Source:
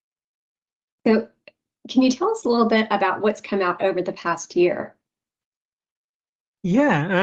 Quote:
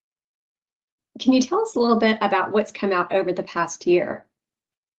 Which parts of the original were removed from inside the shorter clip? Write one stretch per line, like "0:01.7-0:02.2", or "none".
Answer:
0:01.0-0:01.7